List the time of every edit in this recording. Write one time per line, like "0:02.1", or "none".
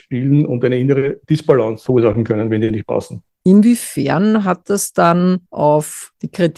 0:03.4

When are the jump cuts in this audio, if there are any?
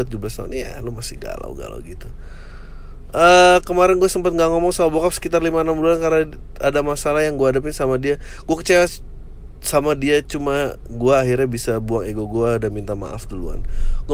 none

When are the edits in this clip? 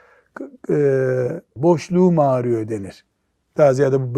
0:01.6

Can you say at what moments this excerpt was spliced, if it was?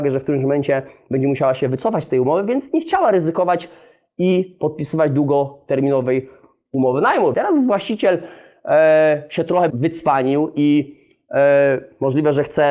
0:07.3
0:09.7

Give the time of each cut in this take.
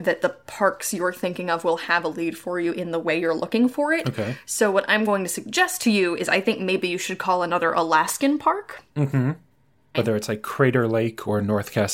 0:09.9

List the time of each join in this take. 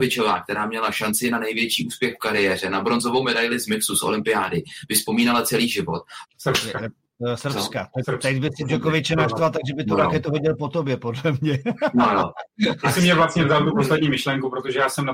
0:06.2

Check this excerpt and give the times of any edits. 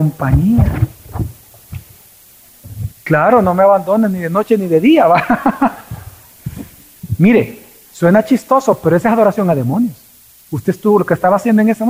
0:02.9

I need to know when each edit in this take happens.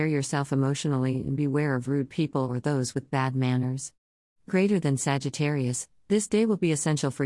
none

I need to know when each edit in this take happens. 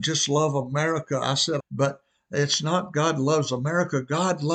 0:01.6

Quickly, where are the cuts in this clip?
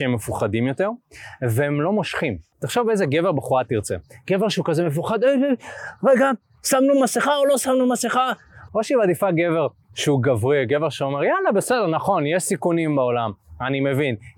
0:08.7

